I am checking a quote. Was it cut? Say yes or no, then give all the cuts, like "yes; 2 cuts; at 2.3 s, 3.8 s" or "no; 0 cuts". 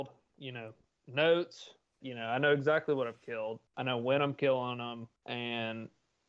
yes; 1 cut; at 2.0 s